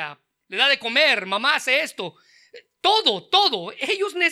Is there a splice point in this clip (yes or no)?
no